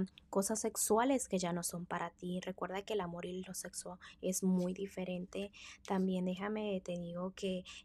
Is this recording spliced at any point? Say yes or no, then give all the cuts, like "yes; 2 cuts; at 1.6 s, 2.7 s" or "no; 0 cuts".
no; 0 cuts